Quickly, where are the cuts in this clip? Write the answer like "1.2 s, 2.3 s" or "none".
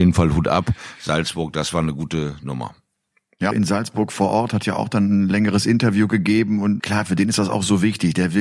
3.5 s, 6.8 s

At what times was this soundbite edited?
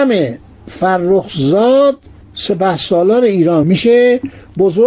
3.6 s

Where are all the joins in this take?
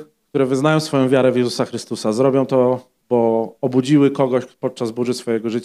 none

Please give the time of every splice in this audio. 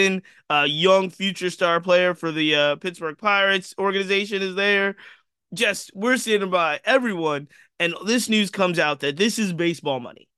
none

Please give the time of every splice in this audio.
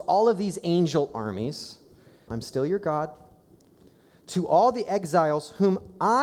2.3 s

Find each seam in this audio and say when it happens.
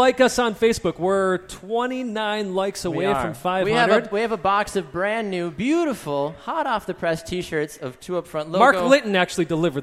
none

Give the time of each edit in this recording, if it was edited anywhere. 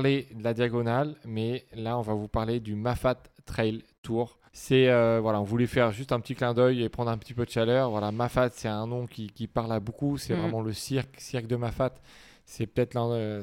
4.5 s

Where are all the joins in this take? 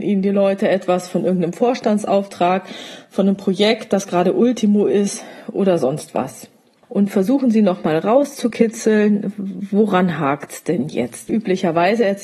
6.8 s, 11.3 s

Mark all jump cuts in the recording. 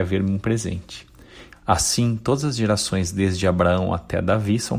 1.5 s

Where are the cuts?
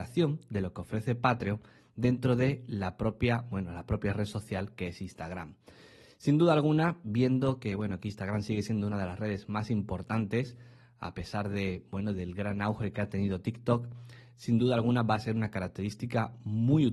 none

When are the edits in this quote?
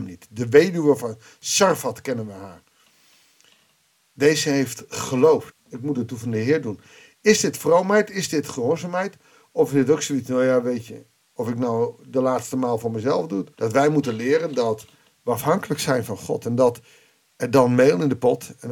5.5 s, 13.5 s

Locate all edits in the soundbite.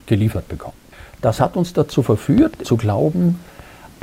2.6 s

